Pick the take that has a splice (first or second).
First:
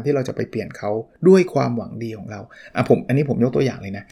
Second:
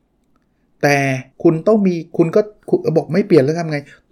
second